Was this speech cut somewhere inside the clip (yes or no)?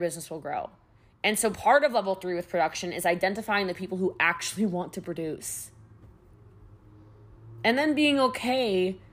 no